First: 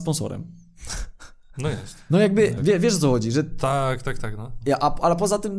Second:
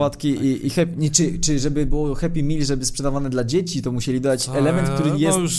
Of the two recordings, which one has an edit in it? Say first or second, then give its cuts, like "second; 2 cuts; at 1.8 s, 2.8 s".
first; 2 cuts; at 2.6 s, 4.6 s